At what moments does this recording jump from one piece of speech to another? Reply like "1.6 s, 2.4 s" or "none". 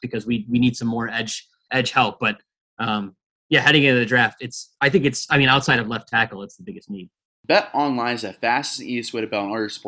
none